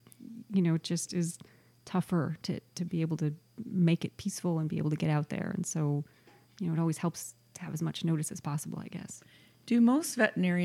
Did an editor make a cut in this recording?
no; 0 cuts

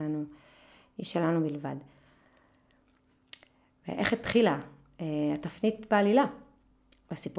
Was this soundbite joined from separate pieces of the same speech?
no; 0 cuts

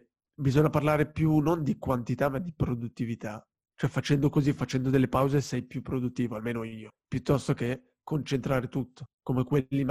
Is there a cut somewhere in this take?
no; 0 cuts

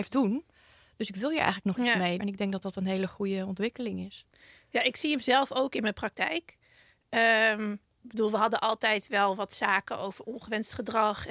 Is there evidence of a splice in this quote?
yes; 1 cut; at 2.2 s

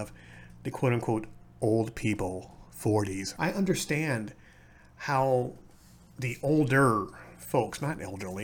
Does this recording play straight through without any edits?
no; 1 cut; at 3.4 s

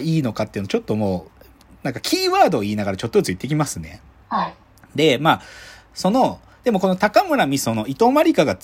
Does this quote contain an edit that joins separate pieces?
no; 0 cuts

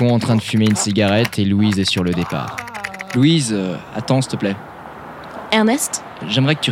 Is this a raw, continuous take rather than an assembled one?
yes; 0 cuts

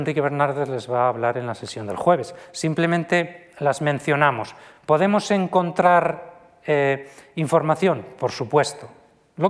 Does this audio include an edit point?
no; 0 cuts

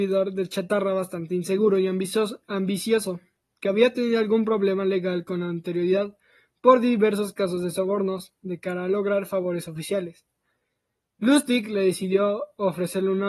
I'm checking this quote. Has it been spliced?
no; 0 cuts

